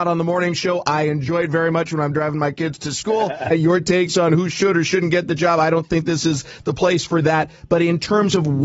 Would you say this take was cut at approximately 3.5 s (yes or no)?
yes